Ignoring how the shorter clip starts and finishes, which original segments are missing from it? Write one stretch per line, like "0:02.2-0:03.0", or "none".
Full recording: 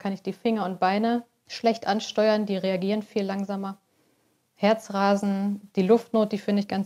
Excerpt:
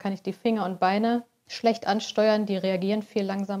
none

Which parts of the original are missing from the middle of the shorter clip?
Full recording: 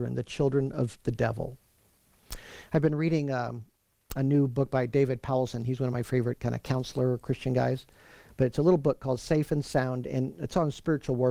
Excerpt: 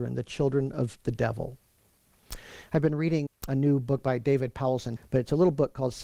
0:03.3-0:03.9
0:05.6-0:08.2

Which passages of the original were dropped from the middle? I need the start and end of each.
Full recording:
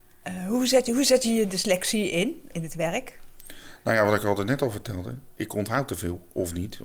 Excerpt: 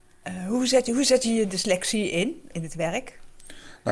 none

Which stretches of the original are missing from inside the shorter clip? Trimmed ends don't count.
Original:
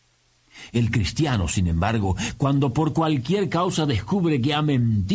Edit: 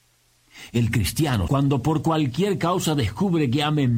0:01.5-0:02.4

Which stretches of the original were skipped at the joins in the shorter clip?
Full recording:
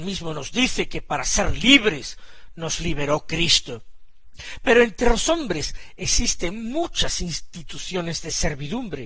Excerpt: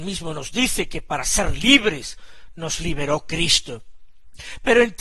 none

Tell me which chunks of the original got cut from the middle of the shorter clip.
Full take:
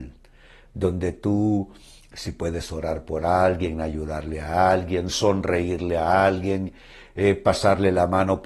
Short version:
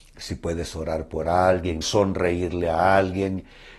0:03.8-0:05.1

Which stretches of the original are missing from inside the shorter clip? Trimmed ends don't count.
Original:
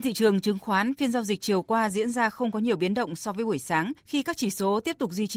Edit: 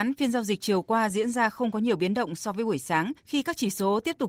none

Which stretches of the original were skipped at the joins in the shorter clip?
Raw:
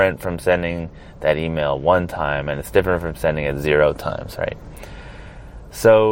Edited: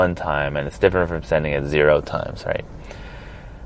none

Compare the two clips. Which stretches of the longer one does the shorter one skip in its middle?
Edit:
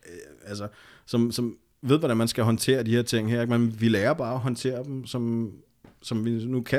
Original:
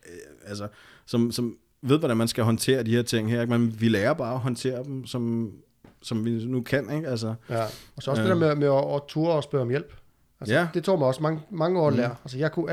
none

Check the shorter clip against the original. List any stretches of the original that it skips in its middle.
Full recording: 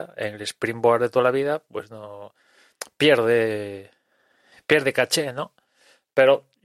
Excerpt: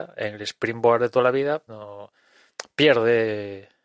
0:01.7-0:01.9

